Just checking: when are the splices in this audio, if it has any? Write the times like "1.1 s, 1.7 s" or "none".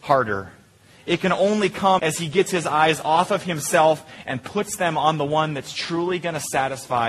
2.0 s

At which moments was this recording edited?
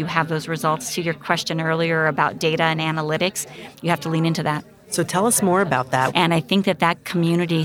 6.1 s

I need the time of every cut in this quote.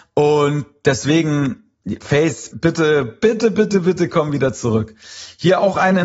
2.5 s

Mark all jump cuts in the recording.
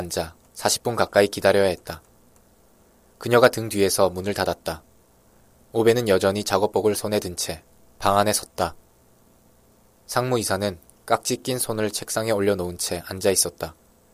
none

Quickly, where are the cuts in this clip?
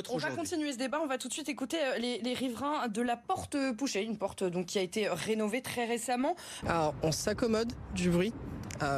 6.6 s

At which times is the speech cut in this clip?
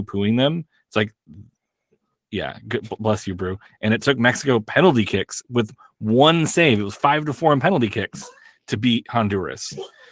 3.7 s

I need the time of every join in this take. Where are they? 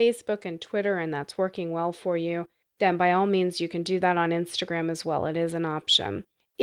none

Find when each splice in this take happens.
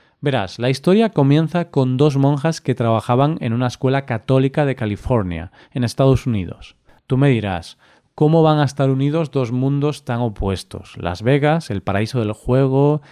7.0 s

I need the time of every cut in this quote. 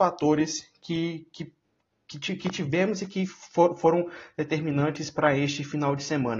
none

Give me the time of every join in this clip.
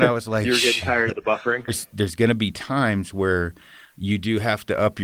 1.7 s

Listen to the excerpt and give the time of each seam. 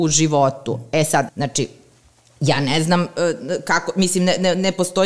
1.3 s

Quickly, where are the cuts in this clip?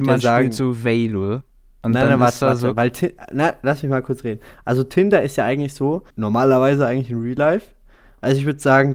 6.1 s

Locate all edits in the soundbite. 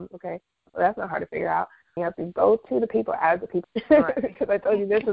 2.0 s, 3.6 s

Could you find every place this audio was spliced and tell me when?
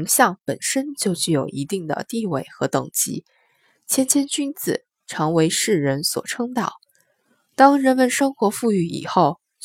none

